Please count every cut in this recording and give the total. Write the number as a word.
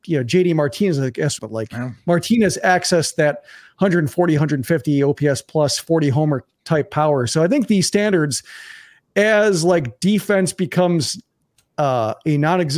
one